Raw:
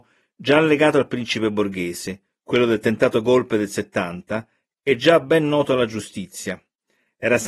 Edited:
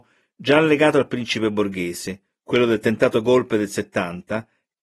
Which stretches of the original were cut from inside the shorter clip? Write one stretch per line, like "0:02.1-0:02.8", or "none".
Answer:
none